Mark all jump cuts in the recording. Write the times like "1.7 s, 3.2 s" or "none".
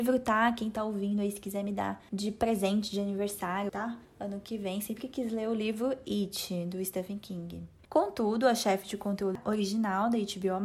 3.7 s, 7.8 s